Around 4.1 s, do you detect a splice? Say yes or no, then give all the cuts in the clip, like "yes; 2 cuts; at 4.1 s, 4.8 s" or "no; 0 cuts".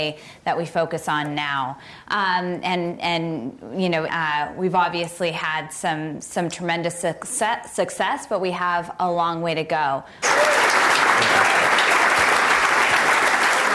yes; 2 cuts; at 4.1 s, 10.2 s